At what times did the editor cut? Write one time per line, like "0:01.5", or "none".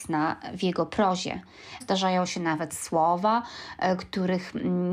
0:01.8